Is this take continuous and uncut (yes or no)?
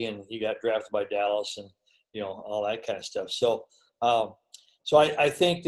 yes